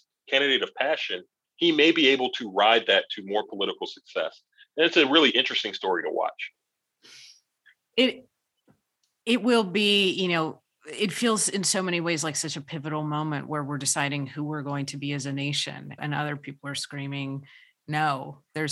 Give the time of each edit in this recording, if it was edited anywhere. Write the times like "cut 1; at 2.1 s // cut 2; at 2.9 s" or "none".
cut 1; at 16.0 s